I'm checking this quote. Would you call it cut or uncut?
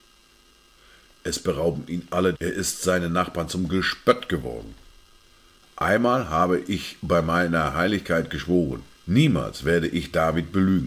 cut